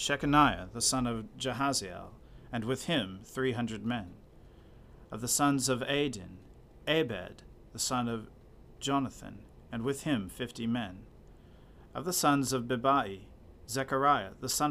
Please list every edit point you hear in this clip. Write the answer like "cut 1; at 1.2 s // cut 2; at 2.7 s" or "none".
cut 1; at 11.9 s